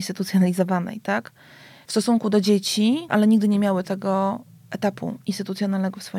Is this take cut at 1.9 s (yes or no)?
yes